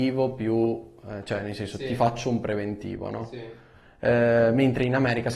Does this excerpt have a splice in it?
no; 0 cuts

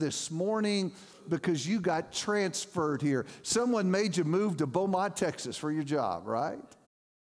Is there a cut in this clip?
no; 0 cuts

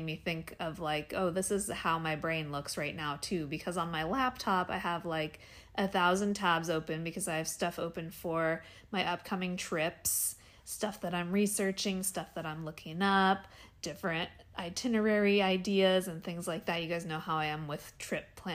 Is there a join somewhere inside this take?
no; 0 cuts

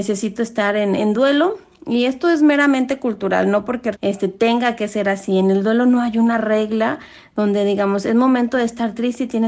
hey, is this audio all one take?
no; 2 cuts; at 1.0 s, 3.9 s

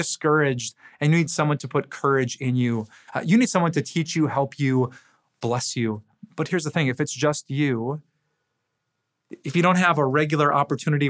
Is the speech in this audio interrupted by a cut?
no; 0 cuts

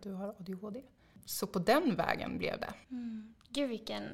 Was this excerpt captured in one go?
no; 1 cut; at 2.8 s

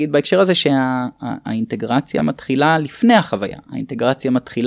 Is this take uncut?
yes; 0 cuts

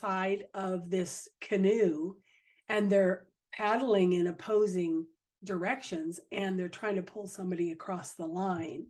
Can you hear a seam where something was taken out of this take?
no; 0 cuts

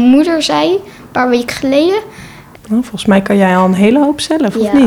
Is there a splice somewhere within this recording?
yes; 1 cut; at 2.5 s

